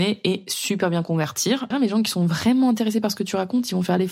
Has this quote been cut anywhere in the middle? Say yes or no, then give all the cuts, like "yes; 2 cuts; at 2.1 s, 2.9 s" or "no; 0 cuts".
yes; 1 cut; at 1.7 s